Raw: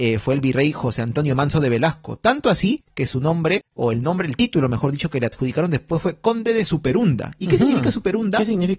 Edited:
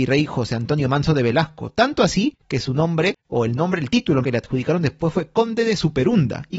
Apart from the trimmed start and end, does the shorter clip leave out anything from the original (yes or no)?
yes